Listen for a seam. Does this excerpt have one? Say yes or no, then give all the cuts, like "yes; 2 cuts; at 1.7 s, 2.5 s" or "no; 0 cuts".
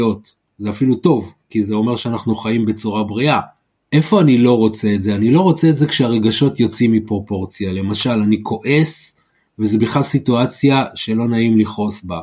no; 0 cuts